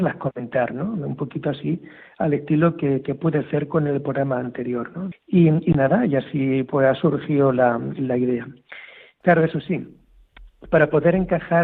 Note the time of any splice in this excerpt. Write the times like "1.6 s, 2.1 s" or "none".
5.1 s, 9.2 s